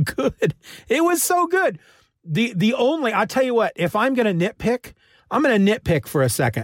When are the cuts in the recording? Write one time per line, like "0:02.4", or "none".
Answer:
none